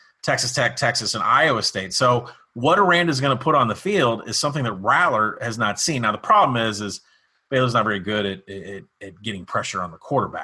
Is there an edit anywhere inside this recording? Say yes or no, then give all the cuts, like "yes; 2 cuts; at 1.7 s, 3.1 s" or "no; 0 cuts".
no; 0 cuts